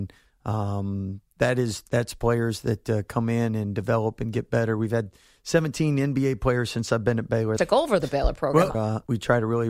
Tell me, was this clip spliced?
yes; 2 cuts; at 7.6 s, 8.7 s

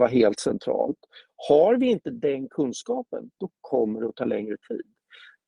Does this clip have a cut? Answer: no; 0 cuts

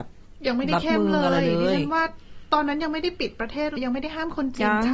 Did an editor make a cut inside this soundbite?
yes; 1 cut; at 3.8 s

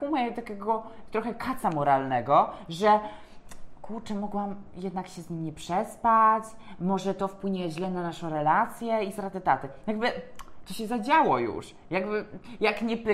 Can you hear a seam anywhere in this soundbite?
no; 0 cuts

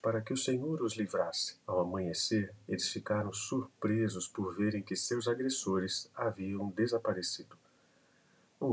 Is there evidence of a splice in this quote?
yes; 1 cut; at 1.6 s

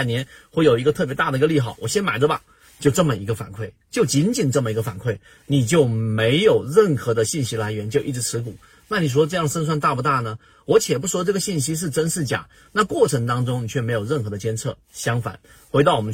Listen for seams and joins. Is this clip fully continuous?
yes; 0 cuts

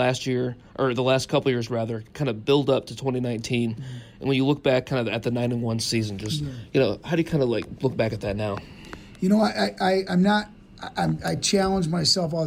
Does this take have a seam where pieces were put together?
no; 0 cuts

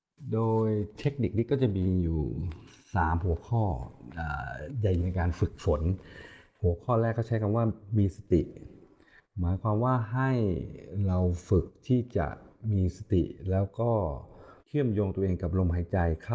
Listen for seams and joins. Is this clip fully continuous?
no; 2 cuts; at 5.0 s, 14.6 s

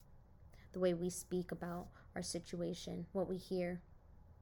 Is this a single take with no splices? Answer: no; 1 cut; at 3.1 s

